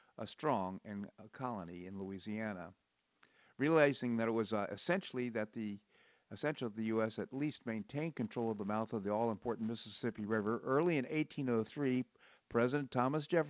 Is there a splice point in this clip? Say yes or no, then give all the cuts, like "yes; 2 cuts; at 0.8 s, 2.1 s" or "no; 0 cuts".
no; 0 cuts